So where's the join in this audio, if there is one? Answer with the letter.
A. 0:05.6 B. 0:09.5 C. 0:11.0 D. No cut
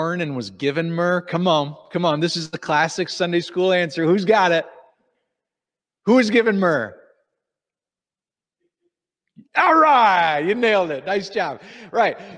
B